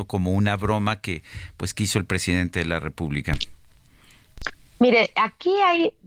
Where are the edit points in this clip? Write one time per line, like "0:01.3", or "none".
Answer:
none